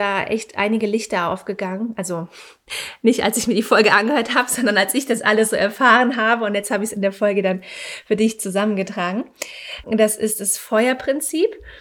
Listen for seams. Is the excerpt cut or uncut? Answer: cut